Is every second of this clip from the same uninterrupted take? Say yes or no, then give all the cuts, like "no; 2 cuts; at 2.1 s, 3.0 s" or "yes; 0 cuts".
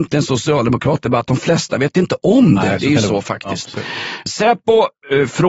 no; 1 cut; at 4.3 s